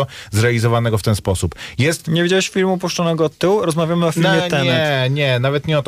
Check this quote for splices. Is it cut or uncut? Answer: uncut